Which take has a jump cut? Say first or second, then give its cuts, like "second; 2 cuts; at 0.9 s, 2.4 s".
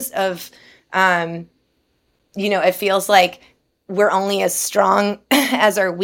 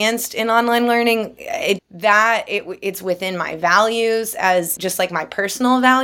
second; 2 cuts; at 1.8 s, 4.8 s